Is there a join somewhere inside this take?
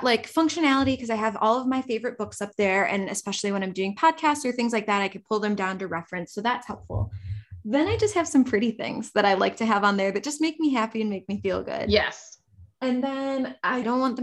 no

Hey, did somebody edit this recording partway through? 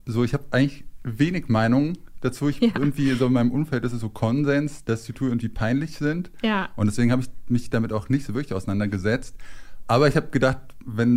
no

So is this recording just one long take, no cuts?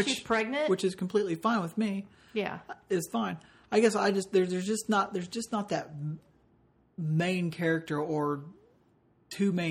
yes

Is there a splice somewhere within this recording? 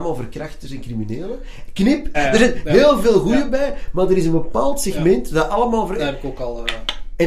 yes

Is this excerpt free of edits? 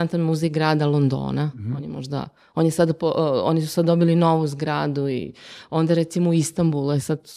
yes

